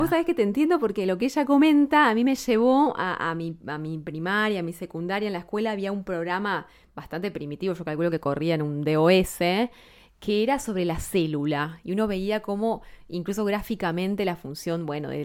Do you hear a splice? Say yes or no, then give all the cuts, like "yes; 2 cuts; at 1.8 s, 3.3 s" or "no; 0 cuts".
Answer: no; 0 cuts